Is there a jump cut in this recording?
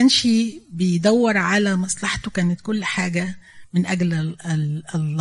no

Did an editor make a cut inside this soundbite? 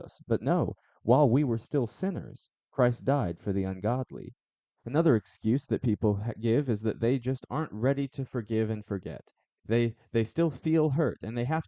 no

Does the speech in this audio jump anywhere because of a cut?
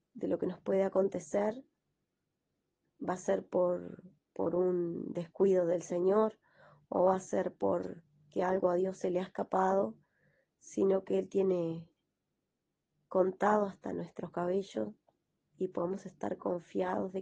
no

